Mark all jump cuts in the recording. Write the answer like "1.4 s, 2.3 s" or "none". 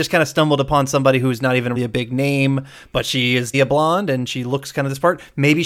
1.8 s, 3.5 s